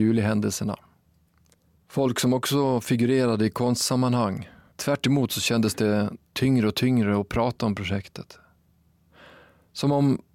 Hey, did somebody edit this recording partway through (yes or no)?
yes